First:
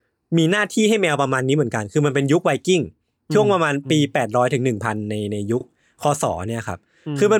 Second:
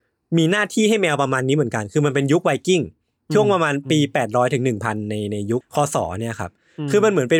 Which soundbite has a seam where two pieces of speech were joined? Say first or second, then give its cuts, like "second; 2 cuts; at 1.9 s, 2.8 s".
second; 1 cut; at 5.6 s